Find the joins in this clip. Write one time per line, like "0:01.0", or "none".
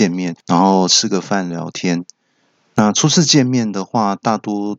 0:01.5